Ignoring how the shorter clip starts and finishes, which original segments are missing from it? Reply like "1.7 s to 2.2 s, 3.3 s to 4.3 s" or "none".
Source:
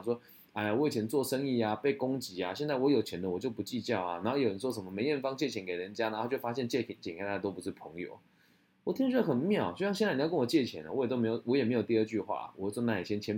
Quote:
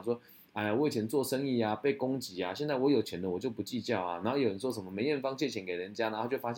none